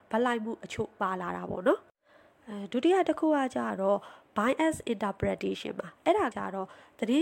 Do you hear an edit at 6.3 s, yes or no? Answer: yes